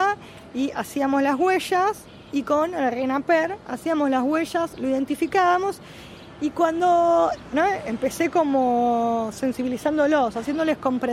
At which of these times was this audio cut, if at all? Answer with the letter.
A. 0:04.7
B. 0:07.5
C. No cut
B